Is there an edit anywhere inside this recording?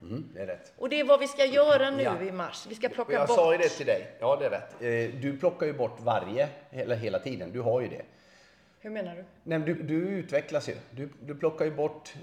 yes; 1 cut; at 9.8 s

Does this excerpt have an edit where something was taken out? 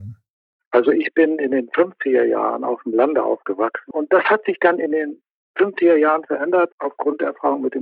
yes; 2 cuts; at 3.9 s, 6.7 s

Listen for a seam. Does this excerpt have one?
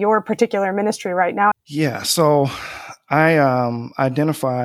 yes; 1 cut; at 1.5 s

